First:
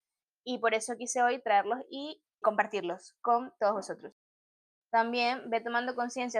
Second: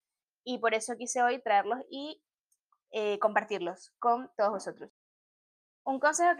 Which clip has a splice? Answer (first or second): first